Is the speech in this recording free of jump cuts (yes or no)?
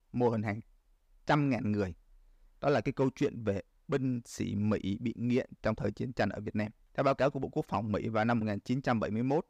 yes